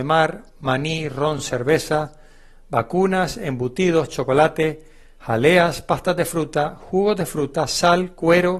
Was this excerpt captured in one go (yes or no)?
yes